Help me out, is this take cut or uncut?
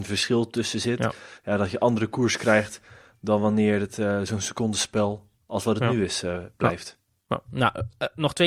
uncut